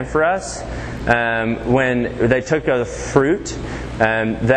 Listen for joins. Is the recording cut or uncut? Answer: uncut